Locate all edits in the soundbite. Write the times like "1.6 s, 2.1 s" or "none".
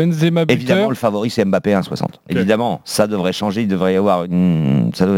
2.3 s